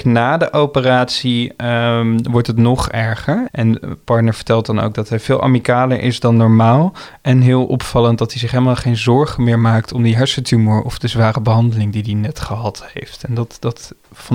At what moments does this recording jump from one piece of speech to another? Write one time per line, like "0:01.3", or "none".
0:03.5